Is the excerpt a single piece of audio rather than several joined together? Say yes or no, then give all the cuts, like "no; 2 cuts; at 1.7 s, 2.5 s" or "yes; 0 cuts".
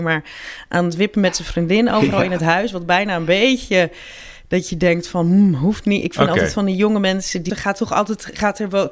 no; 1 cut; at 7.5 s